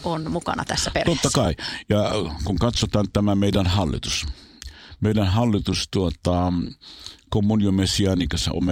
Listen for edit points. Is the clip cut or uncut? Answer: uncut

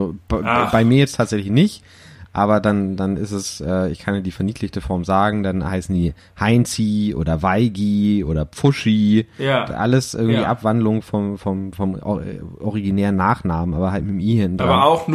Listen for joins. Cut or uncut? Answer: uncut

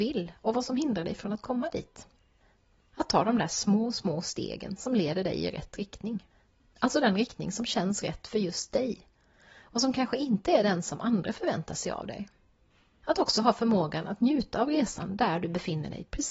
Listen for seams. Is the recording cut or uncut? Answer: uncut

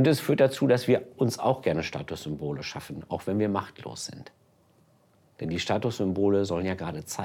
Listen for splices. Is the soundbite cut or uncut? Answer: uncut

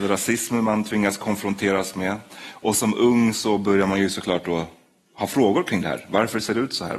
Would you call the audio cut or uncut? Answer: uncut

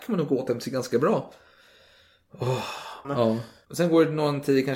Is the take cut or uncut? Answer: cut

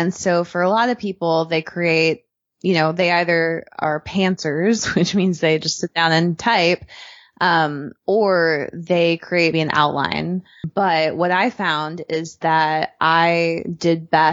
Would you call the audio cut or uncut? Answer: cut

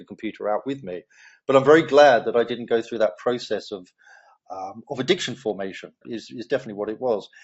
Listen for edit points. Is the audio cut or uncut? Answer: cut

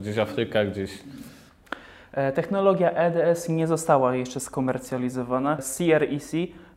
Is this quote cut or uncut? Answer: uncut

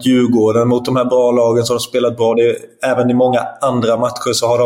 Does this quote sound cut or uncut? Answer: uncut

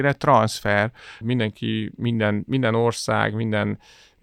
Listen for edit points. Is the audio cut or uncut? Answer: cut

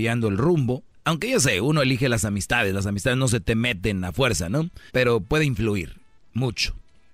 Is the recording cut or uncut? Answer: cut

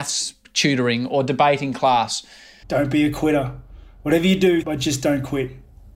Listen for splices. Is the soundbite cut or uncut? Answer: cut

